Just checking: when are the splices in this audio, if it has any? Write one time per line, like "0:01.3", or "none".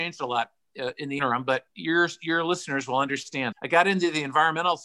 0:01.7
0:03.5